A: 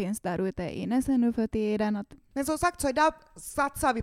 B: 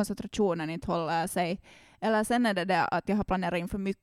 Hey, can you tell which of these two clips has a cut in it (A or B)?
A